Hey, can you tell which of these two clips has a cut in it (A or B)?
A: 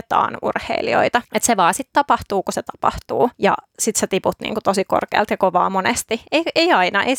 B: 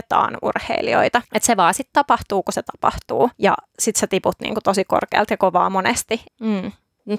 B